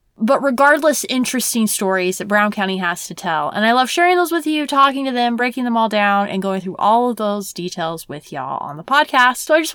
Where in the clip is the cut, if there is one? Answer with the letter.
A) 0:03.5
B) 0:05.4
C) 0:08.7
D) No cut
D